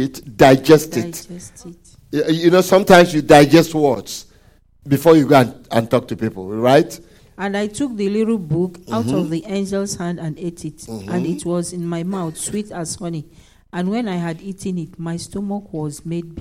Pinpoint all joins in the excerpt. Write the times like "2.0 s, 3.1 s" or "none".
7.2 s